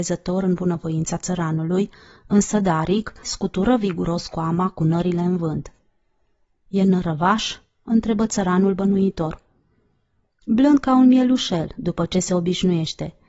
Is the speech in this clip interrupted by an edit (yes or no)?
yes